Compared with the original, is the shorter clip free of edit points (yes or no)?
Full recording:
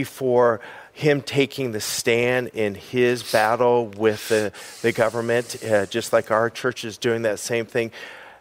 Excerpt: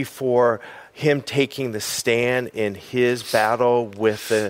yes